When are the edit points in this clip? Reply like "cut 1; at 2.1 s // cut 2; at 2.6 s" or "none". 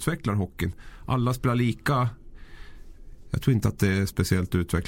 none